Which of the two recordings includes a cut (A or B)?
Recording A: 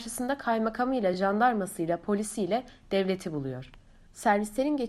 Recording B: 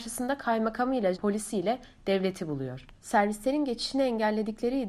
B